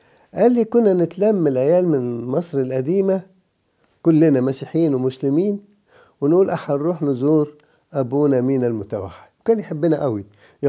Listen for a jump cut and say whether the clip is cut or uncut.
cut